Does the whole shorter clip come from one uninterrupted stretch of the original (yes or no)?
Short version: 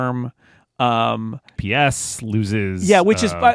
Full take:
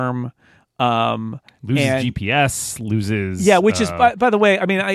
no